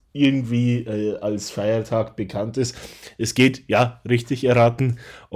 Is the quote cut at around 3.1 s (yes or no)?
no